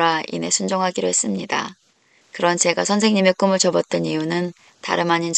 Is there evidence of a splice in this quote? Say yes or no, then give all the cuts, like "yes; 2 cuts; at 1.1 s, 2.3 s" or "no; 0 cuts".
yes; 1 cut; at 2.2 s